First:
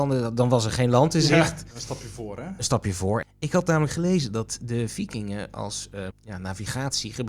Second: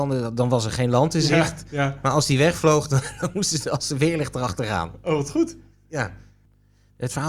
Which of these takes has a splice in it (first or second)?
first